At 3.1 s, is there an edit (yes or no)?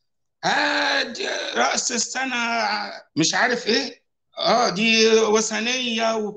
yes